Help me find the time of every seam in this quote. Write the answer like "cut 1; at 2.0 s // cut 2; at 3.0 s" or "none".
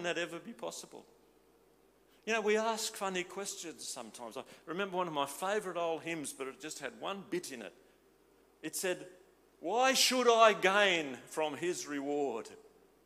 none